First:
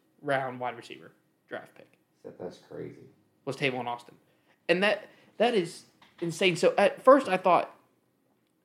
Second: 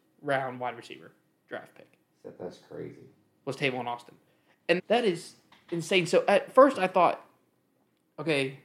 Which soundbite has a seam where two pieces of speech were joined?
second; 1 cut; at 4.8 s

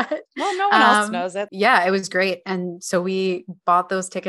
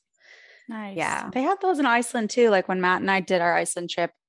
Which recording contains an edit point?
first; 1 cut; at 1.5 s

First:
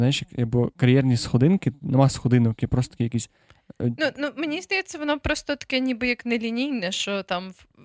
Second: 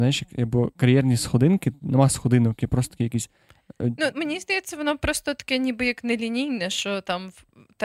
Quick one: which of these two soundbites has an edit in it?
second; 1 cut; at 4.1 s

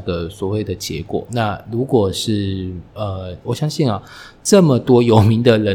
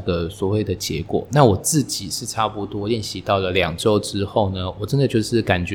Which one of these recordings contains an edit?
first; 2 cuts; at 1.3 s, 3.4 s

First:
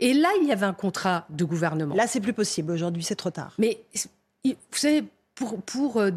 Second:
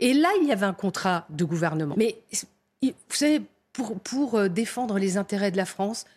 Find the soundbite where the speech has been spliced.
second; 1 cut; at 1.9 s

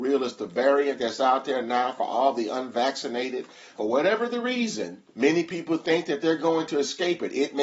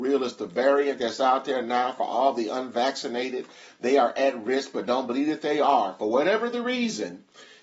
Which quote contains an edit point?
first; 2 cuts; at 3.8 s, 5.1 s

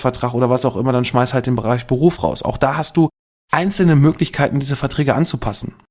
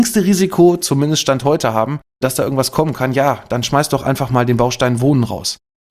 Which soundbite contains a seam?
second; 1 cut; at 2.1 s

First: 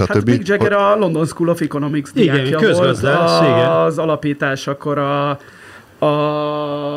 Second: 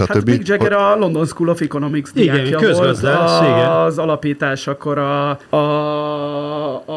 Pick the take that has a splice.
second; 1 cut; at 5.4 s

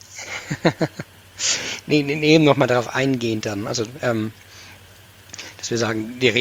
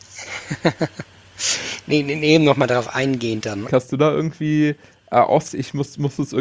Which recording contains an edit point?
second; 2 cuts; at 3.7 s, 5.5 s

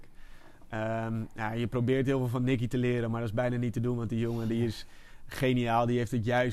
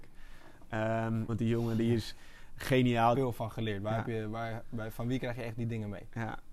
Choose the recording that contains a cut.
second; 2 cuts; at 1.3 s, 3.1 s

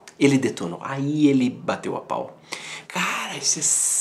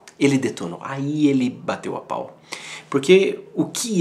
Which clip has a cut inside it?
first; 1 cut; at 2.8 s

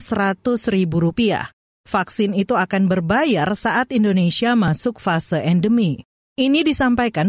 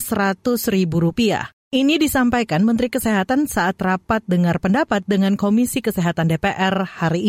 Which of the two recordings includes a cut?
second; 1 cut; at 1.6 s

